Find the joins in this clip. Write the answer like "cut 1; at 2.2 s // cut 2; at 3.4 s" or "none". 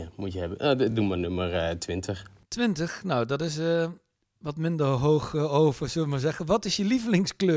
none